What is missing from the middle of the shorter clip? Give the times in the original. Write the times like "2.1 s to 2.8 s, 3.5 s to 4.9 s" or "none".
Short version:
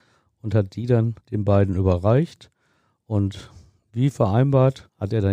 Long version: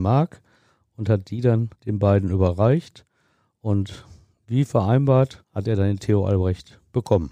none